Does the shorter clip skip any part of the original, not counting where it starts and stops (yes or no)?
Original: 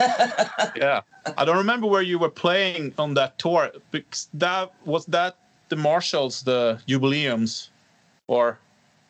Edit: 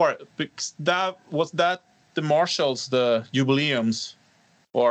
no